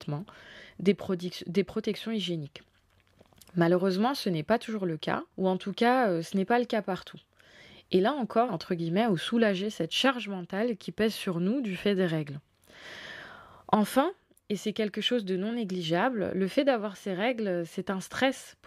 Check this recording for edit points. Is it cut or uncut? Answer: cut